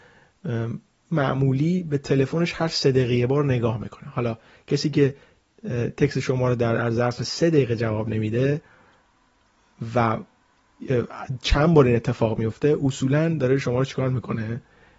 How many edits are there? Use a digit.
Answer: 0